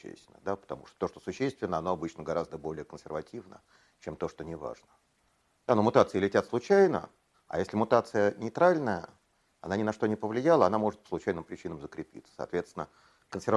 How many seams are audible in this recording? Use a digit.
1